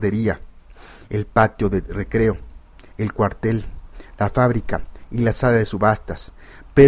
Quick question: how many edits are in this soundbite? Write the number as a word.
zero